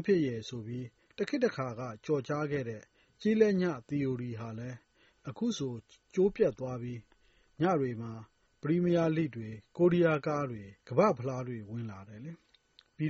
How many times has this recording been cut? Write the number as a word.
one